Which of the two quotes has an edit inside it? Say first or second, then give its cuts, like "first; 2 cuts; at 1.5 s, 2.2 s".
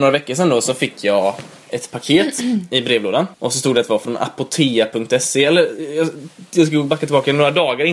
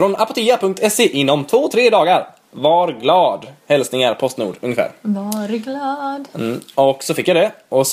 first; 1 cut; at 3.3 s